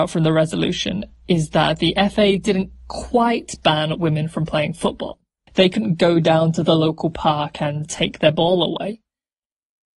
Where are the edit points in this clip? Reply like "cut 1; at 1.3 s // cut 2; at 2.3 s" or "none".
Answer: cut 1; at 5.5 s // cut 2; at 7.8 s